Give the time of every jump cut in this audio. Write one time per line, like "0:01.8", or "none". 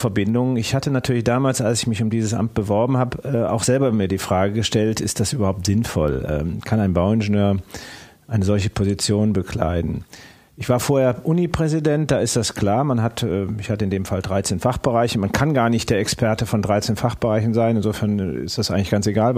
none

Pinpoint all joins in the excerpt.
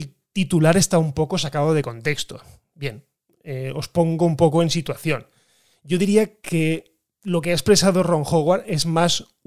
none

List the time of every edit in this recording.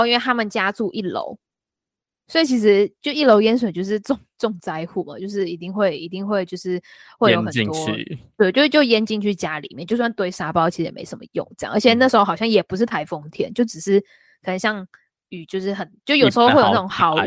none

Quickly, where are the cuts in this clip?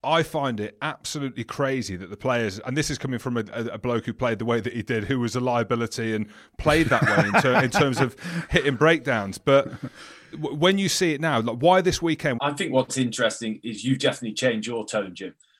0:12.4

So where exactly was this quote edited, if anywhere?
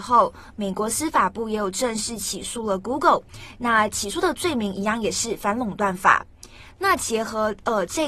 0:06.7

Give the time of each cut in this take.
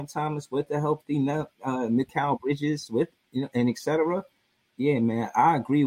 none

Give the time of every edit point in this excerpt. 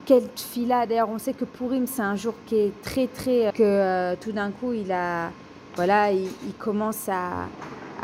0:01.9
0:03.5

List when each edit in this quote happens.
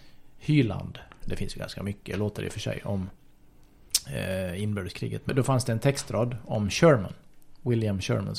0:01.2
0:05.3

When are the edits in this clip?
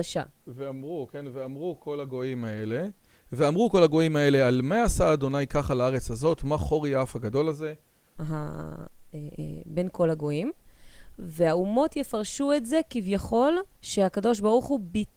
0:08.2
0:13.7

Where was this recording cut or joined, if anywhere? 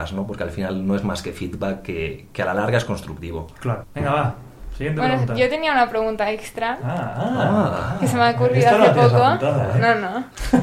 0:03.8

